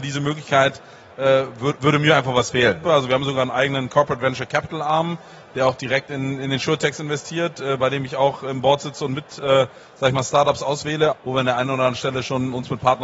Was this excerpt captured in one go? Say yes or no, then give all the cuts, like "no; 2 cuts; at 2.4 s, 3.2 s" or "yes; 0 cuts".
no; 2 cuts; at 2.8 s, 11.1 s